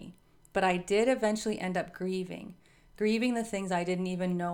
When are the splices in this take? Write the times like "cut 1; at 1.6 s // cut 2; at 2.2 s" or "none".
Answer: none